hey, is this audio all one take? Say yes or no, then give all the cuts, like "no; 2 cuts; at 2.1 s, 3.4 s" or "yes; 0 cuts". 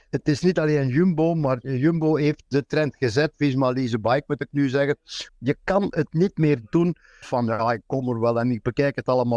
no; 2 cuts; at 5.3 s, 7.2 s